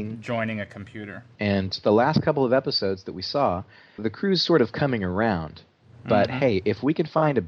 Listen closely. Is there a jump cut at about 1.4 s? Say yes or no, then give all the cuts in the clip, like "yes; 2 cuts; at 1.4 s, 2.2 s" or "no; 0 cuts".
yes; 2 cuts; at 1.4 s, 4.0 s